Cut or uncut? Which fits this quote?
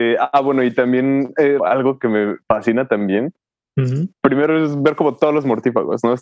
cut